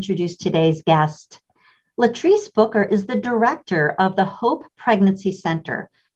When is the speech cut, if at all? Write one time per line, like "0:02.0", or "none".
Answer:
none